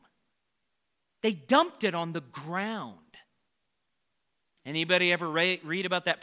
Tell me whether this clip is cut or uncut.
cut